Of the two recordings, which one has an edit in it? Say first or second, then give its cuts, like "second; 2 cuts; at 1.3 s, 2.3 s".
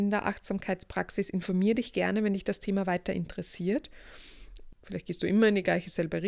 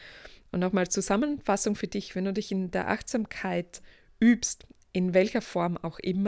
first; 1 cut; at 4.7 s